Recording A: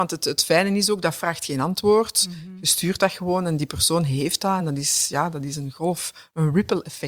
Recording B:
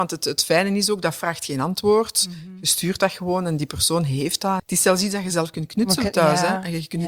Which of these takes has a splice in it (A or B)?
B